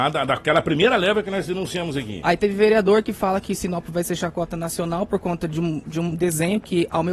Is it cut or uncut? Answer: cut